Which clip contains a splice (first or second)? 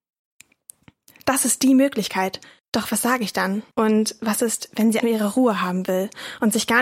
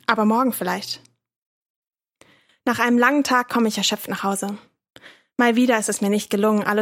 first